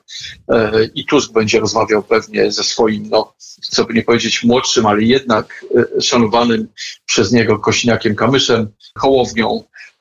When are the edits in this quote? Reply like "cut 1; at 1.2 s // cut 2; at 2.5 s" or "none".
cut 1; at 9.0 s